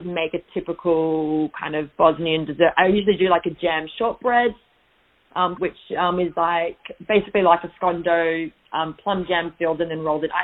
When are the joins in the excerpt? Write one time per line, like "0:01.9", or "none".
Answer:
0:05.5